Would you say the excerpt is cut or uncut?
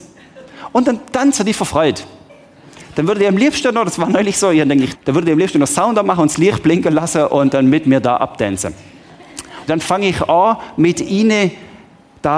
cut